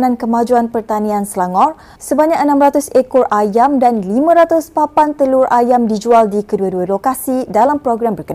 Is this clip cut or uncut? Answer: cut